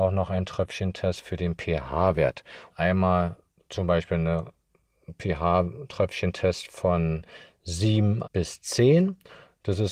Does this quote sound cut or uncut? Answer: cut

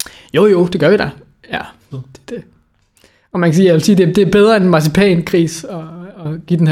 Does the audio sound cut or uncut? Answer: cut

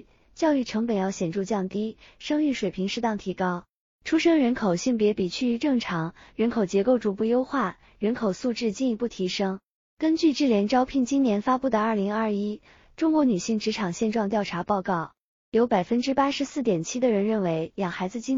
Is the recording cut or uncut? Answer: uncut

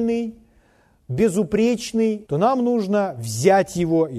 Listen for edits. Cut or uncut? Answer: cut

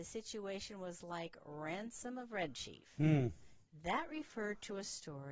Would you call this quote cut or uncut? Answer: uncut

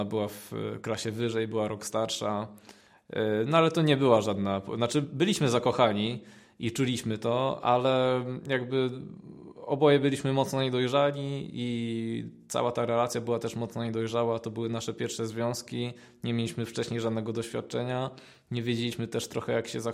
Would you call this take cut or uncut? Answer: uncut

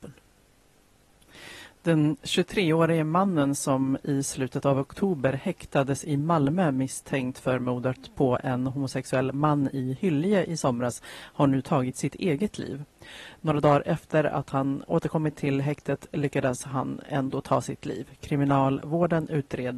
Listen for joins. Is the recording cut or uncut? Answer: cut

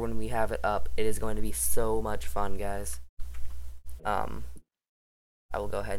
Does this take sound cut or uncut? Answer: cut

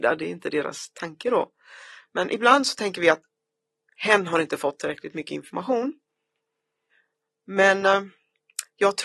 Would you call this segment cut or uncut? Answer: uncut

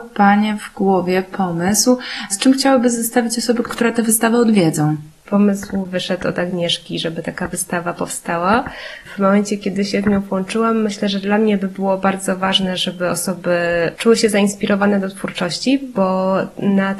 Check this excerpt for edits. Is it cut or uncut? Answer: uncut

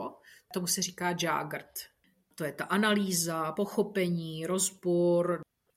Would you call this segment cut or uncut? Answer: uncut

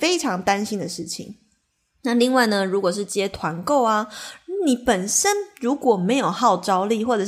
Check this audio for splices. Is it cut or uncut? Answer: uncut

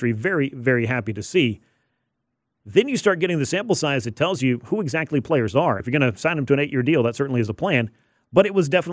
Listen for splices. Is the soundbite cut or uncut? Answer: cut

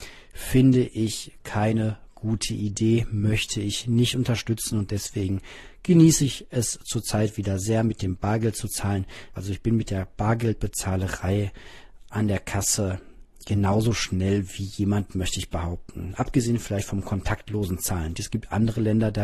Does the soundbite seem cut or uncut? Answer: cut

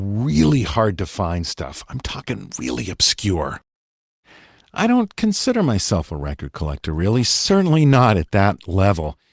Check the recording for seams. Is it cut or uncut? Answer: uncut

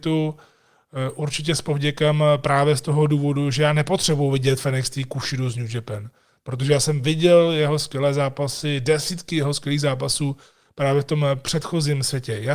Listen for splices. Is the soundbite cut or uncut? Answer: uncut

